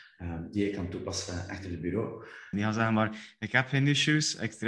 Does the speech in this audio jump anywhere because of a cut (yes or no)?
yes